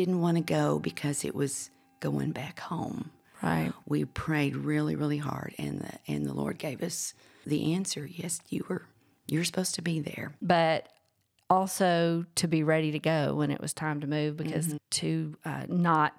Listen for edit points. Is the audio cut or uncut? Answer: cut